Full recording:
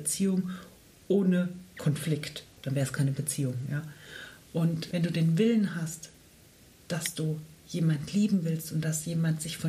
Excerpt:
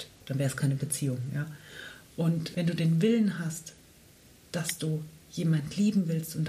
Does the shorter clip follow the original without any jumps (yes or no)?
yes